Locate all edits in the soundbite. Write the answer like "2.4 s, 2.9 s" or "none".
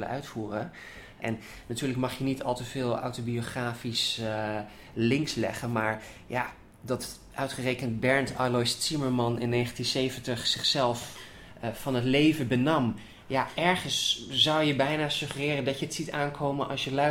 1.2 s